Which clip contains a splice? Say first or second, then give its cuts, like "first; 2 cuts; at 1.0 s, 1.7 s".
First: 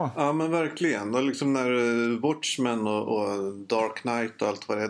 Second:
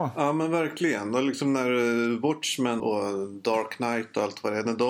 second; 1 cut; at 2.8 s